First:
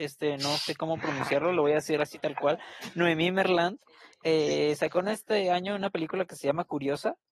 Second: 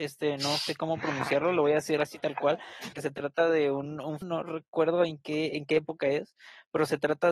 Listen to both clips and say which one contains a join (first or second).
second